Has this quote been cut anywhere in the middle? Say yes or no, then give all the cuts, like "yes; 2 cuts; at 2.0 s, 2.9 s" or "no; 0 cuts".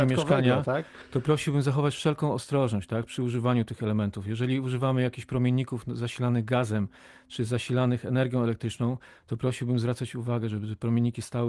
no; 0 cuts